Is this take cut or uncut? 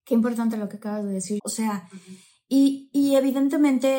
cut